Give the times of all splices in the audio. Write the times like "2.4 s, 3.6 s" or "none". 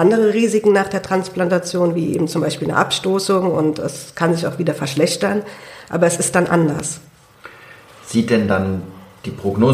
none